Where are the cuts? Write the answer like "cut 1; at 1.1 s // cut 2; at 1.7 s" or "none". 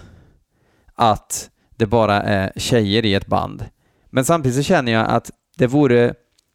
cut 1; at 4.0 s